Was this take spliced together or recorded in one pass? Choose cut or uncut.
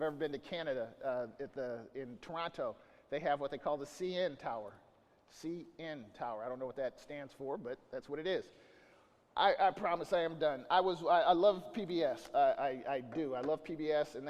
cut